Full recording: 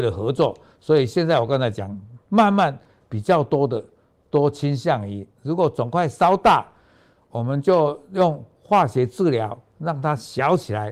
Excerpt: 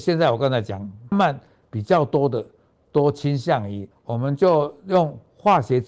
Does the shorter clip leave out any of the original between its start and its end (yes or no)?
yes